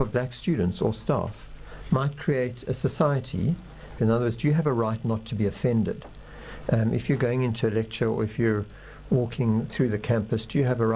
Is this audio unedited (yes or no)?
no